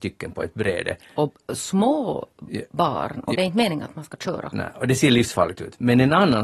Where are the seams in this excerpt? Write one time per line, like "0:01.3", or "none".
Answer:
0:03.3